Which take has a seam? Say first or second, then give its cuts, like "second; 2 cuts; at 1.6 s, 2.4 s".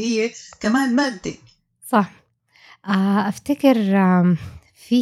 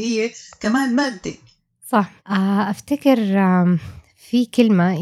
second; 1 cut; at 2.2 s